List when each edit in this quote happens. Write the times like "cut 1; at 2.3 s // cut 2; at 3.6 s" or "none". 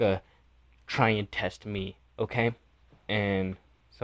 cut 1; at 2.9 s